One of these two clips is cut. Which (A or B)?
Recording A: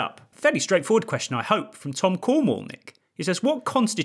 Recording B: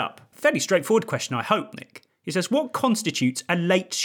B